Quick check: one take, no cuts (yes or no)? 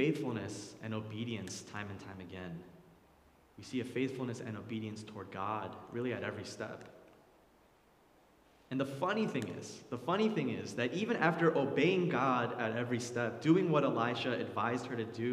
yes